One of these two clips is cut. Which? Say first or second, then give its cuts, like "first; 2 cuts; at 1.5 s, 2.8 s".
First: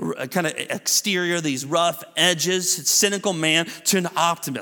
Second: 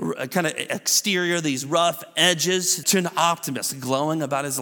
second; 1 cut; at 2.8 s